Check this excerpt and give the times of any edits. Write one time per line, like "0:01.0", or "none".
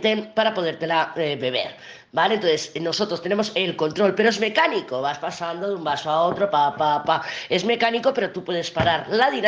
none